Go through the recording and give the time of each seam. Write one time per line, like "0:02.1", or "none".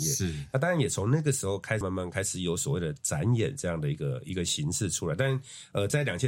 0:01.8